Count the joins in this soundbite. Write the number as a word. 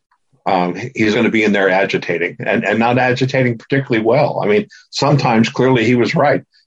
one